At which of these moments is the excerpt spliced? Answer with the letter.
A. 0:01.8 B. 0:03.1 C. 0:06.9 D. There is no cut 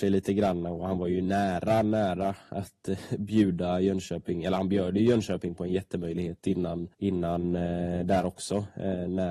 C